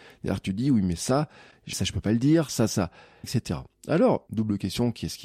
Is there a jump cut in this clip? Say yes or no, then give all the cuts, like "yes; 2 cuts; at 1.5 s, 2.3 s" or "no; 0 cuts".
yes; 3 cuts; at 1.7 s, 3.2 s, 4.3 s